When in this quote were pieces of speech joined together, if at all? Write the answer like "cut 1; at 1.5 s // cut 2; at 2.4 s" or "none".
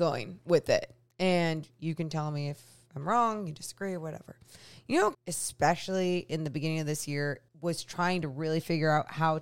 cut 1; at 5.1 s // cut 2; at 7.5 s